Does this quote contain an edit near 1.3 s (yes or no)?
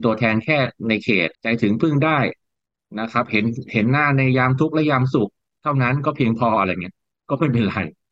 yes